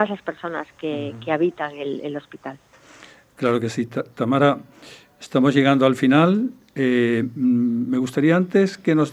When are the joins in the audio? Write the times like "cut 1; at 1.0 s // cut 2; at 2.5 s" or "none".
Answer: none